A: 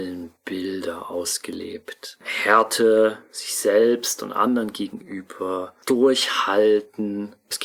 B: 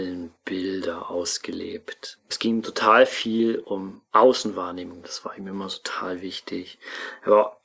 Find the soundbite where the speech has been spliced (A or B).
B